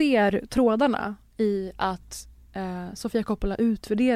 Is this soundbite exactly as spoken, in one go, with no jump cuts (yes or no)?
yes